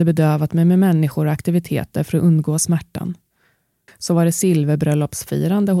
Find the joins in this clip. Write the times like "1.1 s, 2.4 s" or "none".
3.9 s